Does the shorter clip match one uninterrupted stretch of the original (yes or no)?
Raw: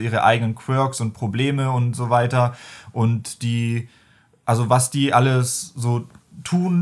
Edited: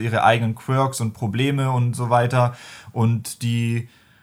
yes